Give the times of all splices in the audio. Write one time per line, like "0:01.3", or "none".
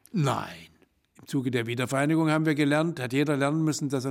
none